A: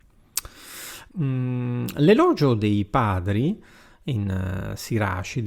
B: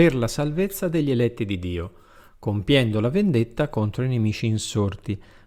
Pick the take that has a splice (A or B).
A